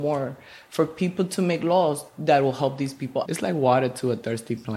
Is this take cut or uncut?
cut